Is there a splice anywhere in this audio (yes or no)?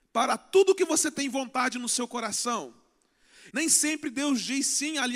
yes